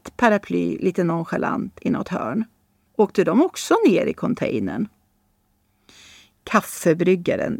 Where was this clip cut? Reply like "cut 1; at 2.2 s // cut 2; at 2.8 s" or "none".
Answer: cut 1; at 2.9 s